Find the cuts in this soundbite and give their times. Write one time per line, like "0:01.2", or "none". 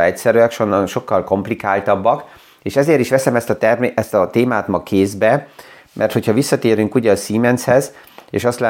none